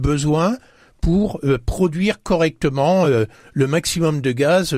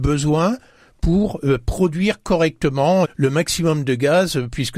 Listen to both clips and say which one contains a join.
second; 1 cut; at 3.0 s

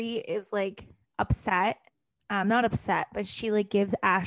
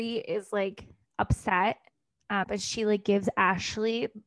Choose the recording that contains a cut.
second; 1 cut; at 2.4 s

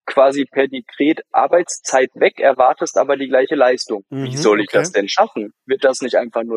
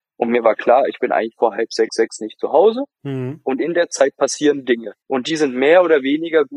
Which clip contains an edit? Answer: second; 1 cut; at 5.0 s

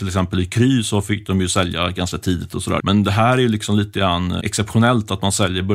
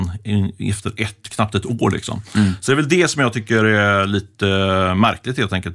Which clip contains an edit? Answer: first; 2 cuts; at 2.8 s, 4.4 s

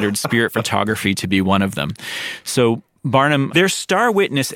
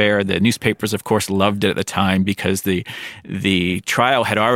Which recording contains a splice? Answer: first; 1 cut; at 3.5 s

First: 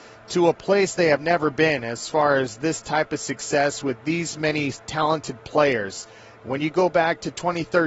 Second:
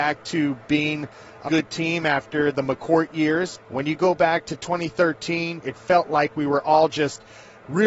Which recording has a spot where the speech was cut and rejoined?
second; 3 cuts; at 1.5 s, 3.6 s, 5.6 s

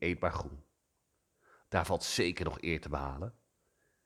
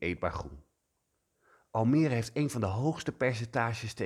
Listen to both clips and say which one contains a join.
first; 1 cut; at 1.6 s

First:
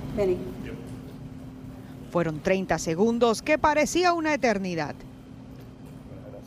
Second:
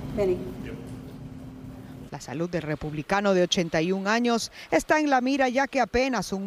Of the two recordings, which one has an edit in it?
second; 1 cut; at 2.1 s

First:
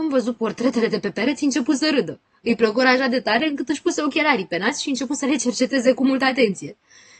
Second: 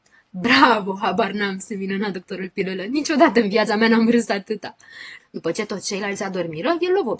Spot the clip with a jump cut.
second; 1 cut; at 5.2 s

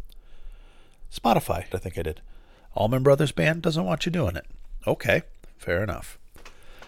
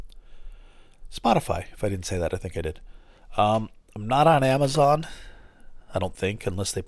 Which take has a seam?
first; 2 cuts; at 1.7 s, 2.7 s

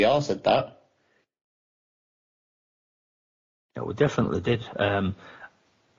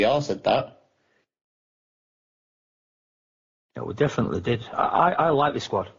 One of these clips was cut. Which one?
second; 1 cut; at 4.7 s

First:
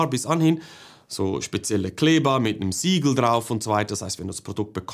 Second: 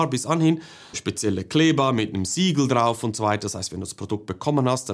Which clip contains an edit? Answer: second; 1 cut; at 0.9 s

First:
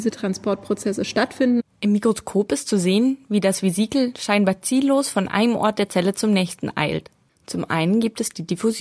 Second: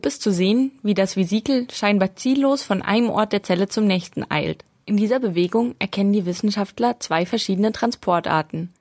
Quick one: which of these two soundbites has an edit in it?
first; 1 cut; at 7.3 s

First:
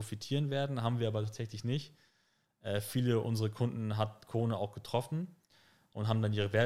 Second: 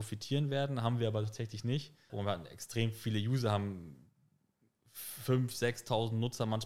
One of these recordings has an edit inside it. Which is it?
second; 1 cut; at 2.1 s

